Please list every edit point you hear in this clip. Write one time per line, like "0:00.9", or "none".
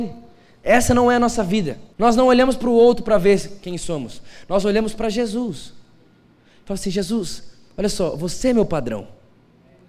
0:01.9